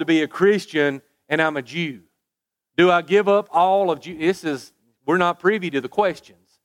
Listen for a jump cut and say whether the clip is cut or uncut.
uncut